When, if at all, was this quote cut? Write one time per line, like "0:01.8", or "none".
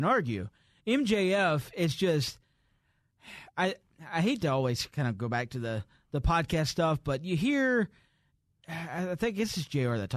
none

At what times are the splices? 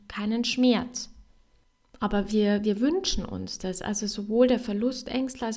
none

